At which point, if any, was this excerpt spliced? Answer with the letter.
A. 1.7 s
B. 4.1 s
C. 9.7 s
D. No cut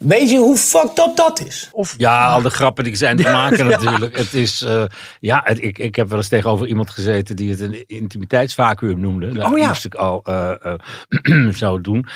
A